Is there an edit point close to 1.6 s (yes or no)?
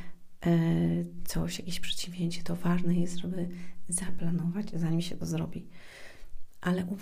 no